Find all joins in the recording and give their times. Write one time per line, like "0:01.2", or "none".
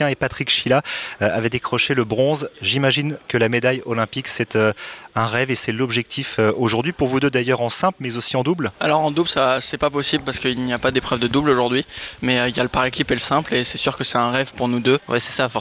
none